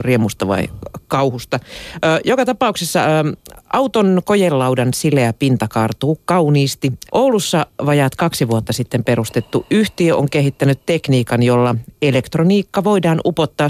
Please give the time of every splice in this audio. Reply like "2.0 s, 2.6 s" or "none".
7.1 s